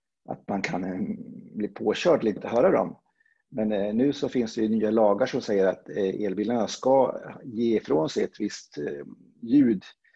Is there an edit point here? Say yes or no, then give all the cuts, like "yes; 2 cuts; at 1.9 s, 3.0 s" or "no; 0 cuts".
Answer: yes; 1 cut; at 2.4 s